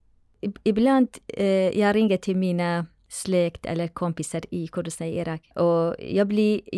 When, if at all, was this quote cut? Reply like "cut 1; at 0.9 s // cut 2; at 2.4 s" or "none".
cut 1; at 5.5 s